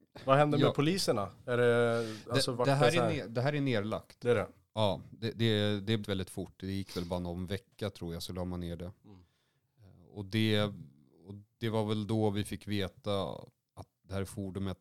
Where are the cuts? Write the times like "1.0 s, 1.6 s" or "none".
6.0 s